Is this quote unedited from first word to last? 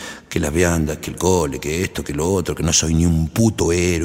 yes; 0 cuts

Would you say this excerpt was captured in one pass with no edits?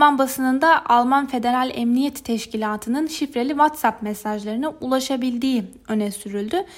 yes; 0 cuts

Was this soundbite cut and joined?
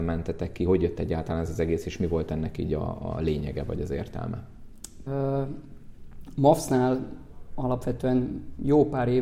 yes; 1 cut; at 5.1 s

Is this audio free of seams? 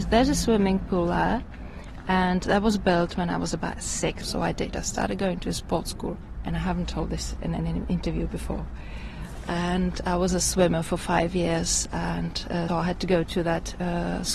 no; 2 cuts; at 4.2 s, 12.7 s

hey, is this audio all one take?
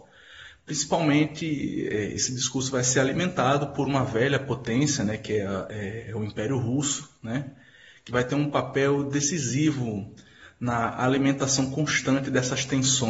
yes; 0 cuts

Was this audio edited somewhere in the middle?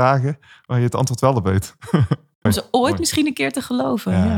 yes; 1 cut; at 2.5 s

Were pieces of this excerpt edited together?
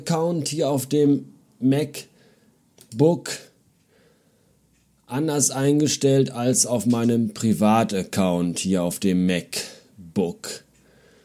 no; 0 cuts

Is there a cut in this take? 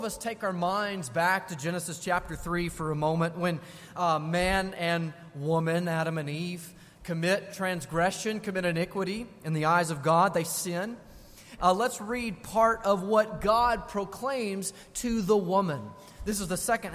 yes; 1 cut; at 11.6 s

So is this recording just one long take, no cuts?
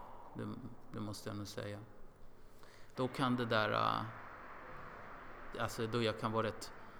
no; 2 cuts; at 2.9 s, 5.5 s

